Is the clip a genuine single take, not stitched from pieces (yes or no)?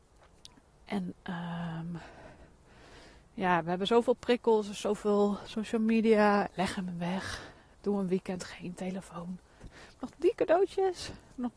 no